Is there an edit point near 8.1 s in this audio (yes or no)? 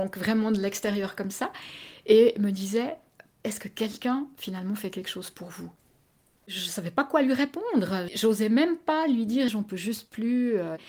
yes